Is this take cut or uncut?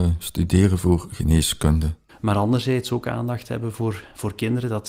cut